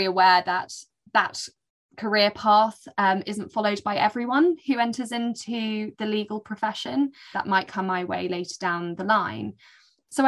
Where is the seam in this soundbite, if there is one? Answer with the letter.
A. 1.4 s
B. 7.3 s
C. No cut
B